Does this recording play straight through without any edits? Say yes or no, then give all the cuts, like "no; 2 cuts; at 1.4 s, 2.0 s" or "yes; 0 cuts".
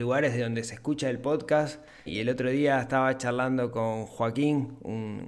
no; 1 cut; at 2.1 s